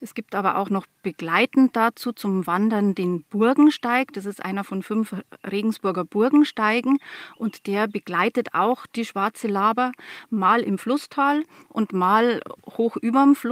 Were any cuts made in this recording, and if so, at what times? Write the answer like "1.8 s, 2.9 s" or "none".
none